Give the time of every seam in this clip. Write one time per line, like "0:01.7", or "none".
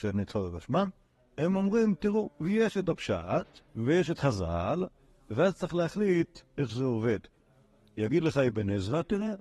0:03.7